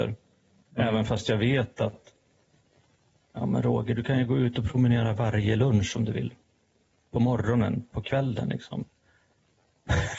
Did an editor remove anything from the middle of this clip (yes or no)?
no